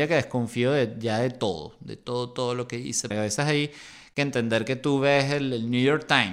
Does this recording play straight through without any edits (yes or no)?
no